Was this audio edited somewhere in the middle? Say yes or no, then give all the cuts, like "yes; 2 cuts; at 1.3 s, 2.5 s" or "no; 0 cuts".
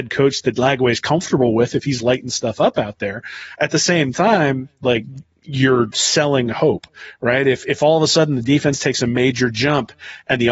no; 0 cuts